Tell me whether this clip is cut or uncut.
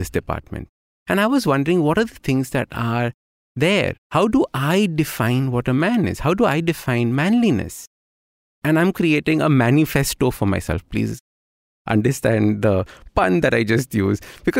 uncut